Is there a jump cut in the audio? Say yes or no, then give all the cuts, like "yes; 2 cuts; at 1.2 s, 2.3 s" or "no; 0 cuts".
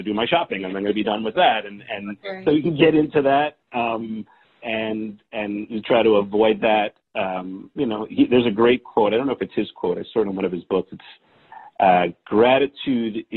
no; 0 cuts